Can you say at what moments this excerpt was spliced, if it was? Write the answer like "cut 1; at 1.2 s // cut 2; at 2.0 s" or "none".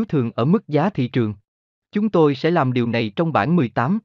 cut 1; at 1.8 s